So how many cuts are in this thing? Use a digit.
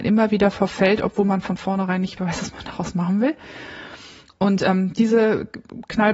1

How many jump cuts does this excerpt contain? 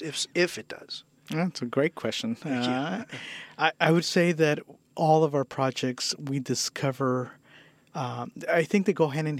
0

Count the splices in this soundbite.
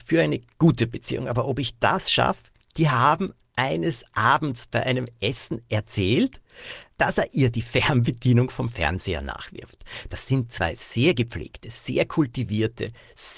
1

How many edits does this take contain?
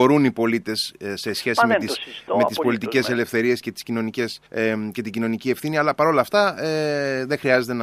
1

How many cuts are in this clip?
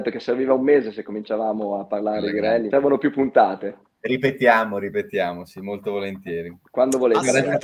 1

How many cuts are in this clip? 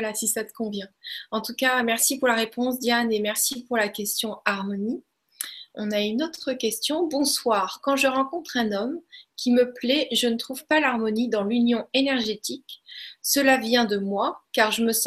0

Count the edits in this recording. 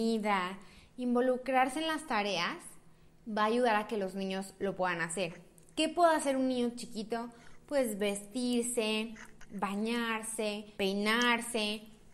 1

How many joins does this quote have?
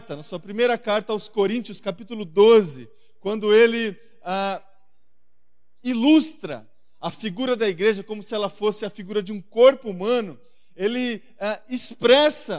0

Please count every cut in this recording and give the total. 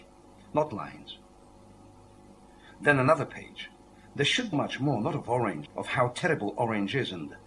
2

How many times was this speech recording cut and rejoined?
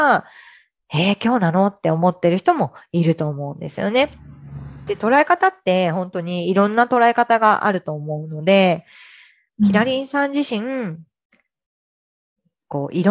2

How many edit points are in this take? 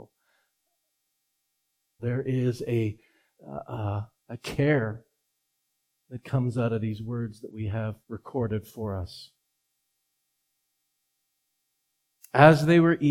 3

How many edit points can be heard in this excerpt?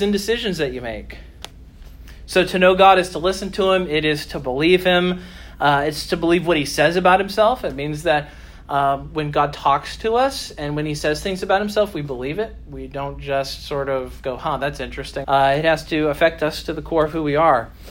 1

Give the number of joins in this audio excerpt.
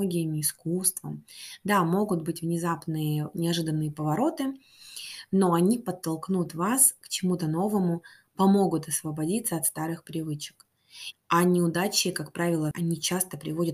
2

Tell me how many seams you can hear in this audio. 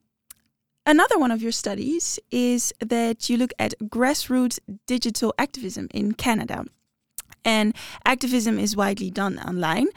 0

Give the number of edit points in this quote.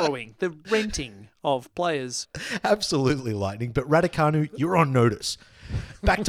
0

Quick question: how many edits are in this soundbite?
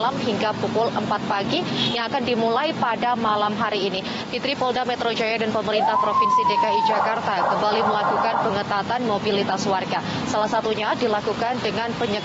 1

